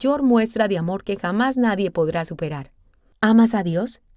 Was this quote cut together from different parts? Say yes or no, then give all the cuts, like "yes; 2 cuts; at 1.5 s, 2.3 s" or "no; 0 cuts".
no; 0 cuts